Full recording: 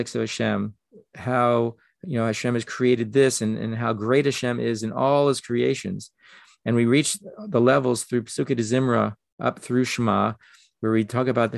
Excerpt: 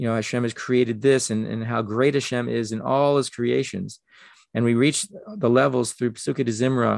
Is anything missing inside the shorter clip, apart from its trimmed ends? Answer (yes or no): no